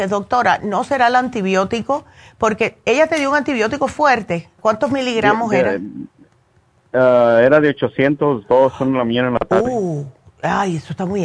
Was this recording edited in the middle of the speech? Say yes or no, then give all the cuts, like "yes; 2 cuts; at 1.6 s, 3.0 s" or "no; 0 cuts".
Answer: yes; 1 cut; at 4.6 s